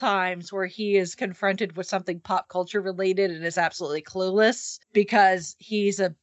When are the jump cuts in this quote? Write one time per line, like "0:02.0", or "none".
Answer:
0:04.8